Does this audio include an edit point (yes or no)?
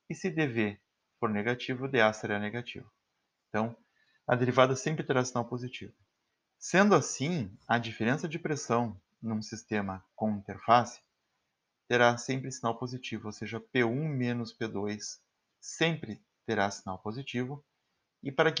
no